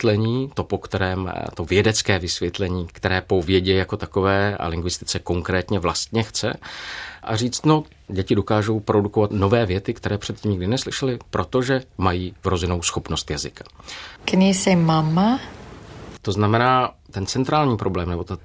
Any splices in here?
yes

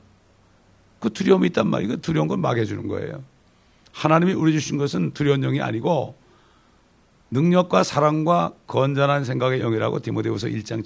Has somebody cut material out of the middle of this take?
no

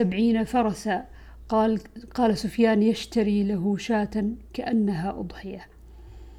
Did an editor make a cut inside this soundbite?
no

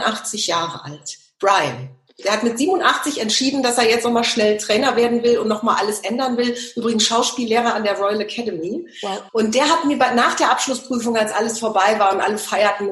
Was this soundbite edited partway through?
yes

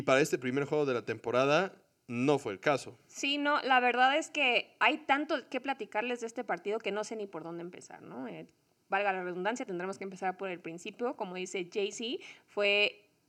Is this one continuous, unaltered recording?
yes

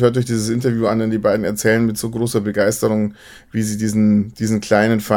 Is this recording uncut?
yes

